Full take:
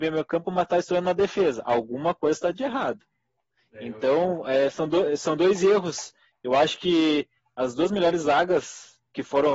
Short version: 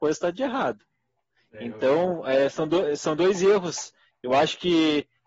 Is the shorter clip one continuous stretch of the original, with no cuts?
yes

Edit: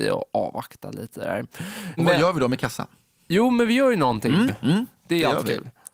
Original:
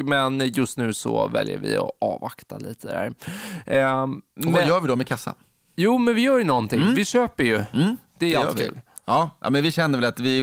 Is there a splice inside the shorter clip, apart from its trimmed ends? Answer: yes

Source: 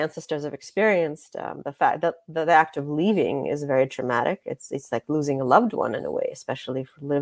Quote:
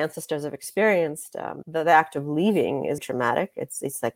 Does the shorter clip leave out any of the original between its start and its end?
yes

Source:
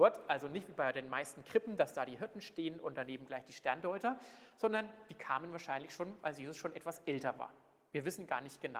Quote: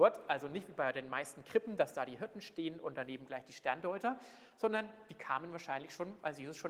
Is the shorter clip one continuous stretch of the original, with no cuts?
yes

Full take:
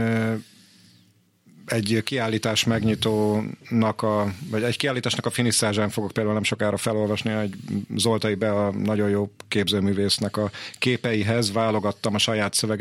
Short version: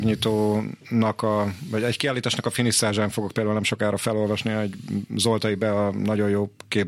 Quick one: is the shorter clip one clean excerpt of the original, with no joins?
yes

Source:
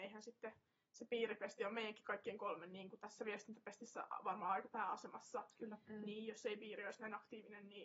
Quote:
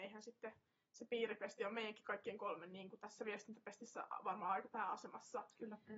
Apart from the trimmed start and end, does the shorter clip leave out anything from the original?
no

